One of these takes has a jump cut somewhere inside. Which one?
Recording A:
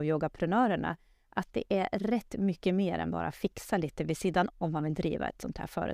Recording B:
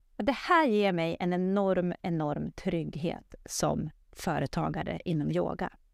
A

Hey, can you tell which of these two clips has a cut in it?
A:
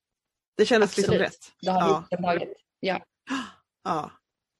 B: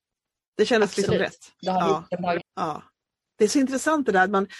B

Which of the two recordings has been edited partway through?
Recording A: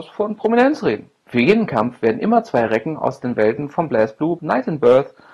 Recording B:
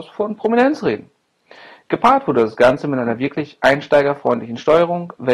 A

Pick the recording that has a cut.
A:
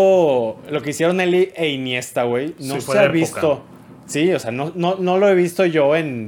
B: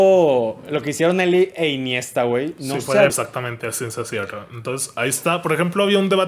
B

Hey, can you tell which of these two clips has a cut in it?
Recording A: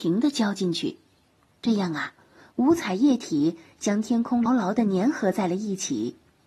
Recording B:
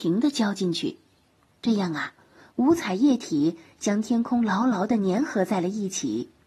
A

